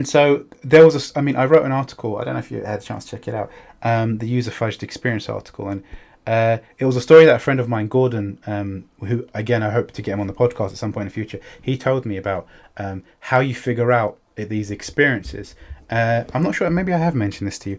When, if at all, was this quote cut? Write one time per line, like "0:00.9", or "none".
none